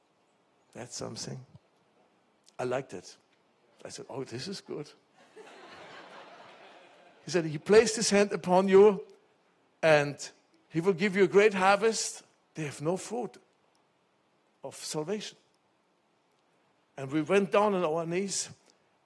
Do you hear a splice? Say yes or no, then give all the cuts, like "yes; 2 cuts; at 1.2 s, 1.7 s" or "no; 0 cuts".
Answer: yes; 1 cut; at 12.4 s